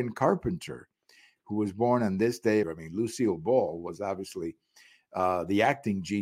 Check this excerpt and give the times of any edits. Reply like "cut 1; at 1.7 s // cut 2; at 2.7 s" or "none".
cut 1; at 2.6 s